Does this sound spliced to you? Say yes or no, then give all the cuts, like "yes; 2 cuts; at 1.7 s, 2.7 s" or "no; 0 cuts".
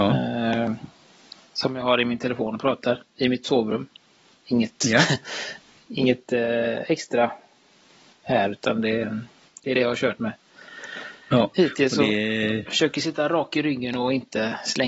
no; 0 cuts